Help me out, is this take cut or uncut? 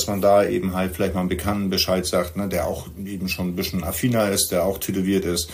uncut